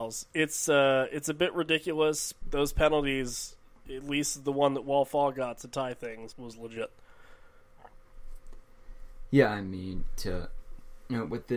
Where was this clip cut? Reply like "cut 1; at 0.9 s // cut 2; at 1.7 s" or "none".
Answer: cut 1; at 2.4 s // cut 2; at 6.3 s